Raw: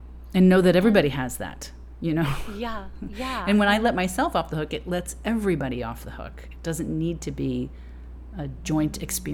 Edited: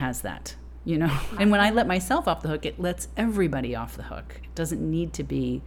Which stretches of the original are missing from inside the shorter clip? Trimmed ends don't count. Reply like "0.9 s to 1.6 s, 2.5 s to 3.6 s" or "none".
2.5 s to 3.4 s